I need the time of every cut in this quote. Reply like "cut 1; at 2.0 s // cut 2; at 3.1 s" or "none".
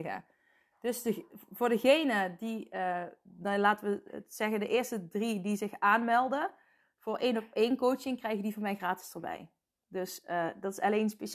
none